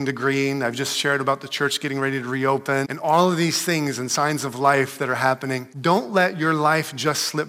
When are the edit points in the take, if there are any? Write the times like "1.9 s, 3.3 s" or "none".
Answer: 2.8 s, 5.7 s